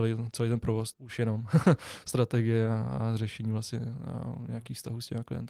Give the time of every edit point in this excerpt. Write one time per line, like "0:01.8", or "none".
0:00.9